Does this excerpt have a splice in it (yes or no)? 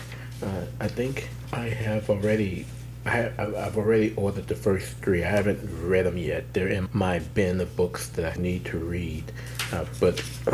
yes